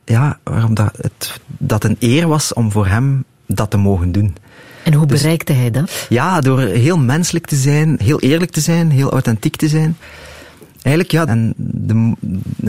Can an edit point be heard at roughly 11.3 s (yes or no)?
yes